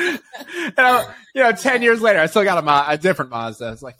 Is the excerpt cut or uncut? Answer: uncut